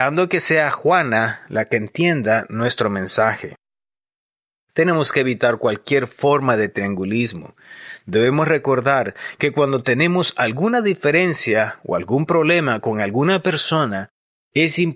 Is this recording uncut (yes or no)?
yes